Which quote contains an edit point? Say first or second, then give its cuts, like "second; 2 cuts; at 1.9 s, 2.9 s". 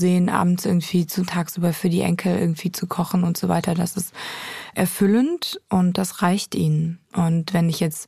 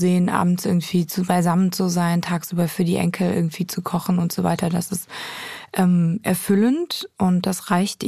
first; 2 cuts; at 1.3 s, 4.7 s